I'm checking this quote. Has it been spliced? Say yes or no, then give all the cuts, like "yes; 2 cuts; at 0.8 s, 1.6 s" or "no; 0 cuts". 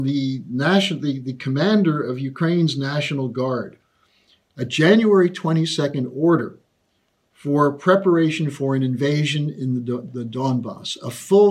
no; 0 cuts